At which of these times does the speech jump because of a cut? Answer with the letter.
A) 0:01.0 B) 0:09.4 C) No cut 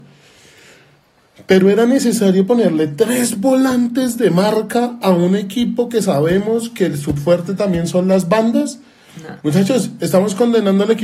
B